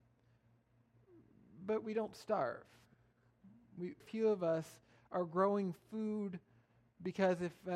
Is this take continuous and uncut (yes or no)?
no